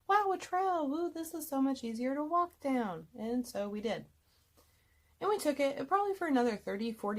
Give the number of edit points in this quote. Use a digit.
0